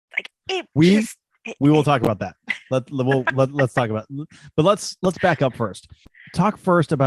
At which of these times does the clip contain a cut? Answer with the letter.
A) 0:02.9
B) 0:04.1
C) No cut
C